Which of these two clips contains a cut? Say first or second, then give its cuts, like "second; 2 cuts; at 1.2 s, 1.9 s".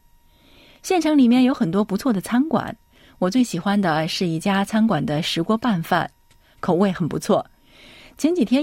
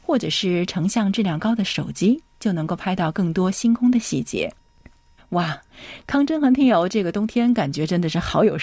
second; 1 cut; at 5.2 s